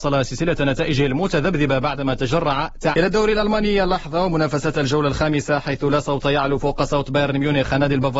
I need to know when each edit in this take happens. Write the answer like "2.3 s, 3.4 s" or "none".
2.9 s